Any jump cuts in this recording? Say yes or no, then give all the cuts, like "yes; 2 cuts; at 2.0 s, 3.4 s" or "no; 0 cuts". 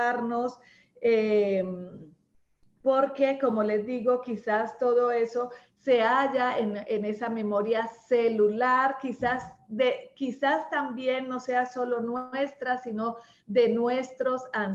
no; 0 cuts